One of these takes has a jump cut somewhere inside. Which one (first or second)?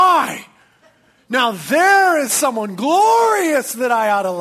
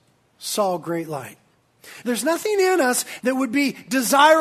second